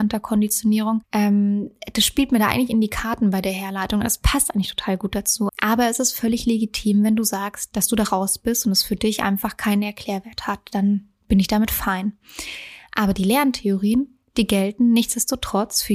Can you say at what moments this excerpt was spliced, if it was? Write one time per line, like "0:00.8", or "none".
0:01.0
0:05.5